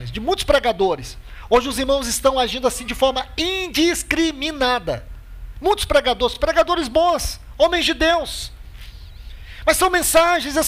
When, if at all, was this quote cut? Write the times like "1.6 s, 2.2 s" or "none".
none

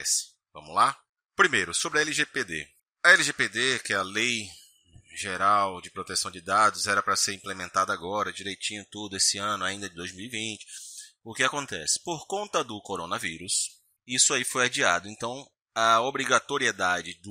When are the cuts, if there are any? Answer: none

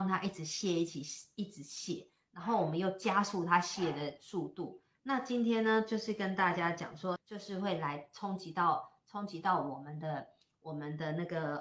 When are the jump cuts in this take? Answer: 5.0 s, 7.2 s

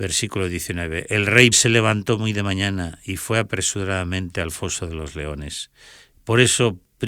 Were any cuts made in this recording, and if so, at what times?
1.5 s, 6.1 s

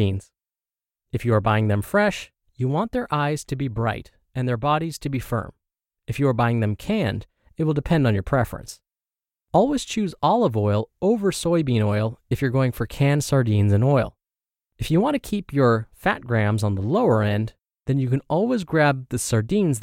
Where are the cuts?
none

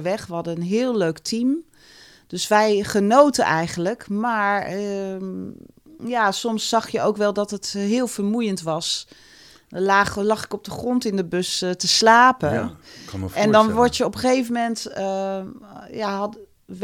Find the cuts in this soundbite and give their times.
none

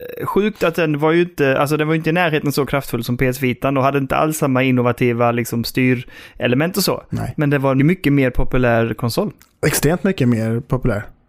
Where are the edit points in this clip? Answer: 7.8 s

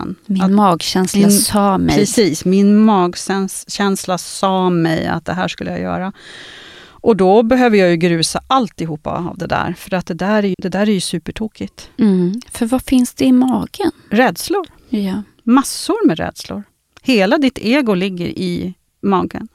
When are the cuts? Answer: 10.5 s

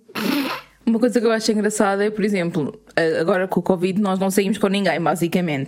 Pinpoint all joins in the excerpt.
3.5 s

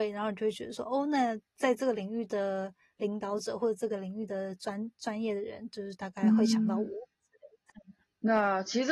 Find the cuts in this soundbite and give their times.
none

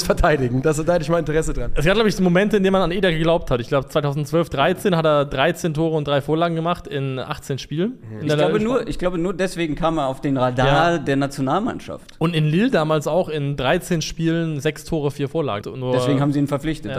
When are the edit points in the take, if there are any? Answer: 15.6 s

